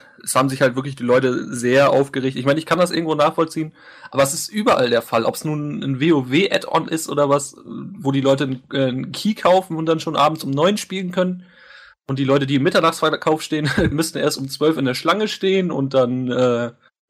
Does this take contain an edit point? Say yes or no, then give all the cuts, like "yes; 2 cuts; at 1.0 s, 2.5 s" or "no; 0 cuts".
yes; 1 cut; at 13.9 s